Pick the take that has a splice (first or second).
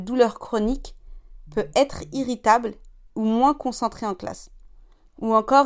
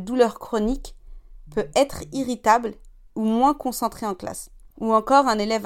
second